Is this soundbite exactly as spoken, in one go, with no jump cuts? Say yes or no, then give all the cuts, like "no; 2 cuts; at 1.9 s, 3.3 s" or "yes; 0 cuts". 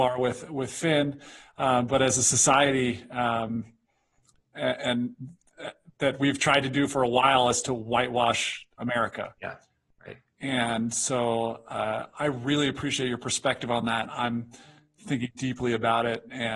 yes; 0 cuts